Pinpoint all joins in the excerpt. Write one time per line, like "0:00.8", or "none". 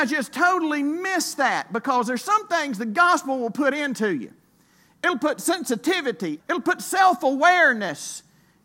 0:06.4